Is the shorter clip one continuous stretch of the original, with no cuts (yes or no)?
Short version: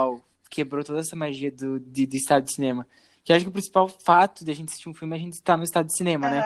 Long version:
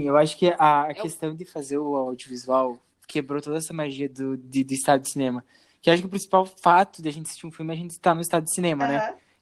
yes